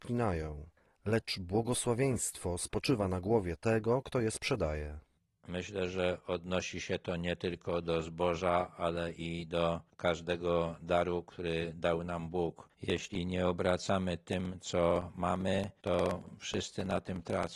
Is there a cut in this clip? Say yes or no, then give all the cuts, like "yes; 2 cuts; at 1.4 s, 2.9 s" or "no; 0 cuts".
no; 0 cuts